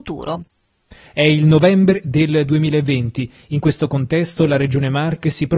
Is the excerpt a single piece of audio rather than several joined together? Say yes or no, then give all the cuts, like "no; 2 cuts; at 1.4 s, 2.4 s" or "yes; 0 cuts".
no; 1 cut; at 1.1 s